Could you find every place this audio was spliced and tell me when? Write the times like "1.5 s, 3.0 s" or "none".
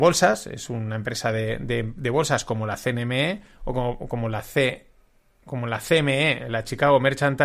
none